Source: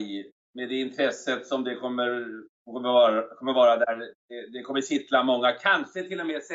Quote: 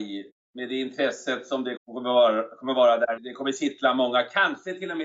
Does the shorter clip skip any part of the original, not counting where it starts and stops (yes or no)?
yes